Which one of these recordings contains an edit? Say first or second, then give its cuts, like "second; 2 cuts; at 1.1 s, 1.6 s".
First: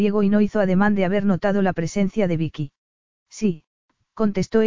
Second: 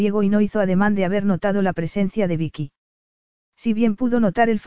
first; 1 cut; at 3.2 s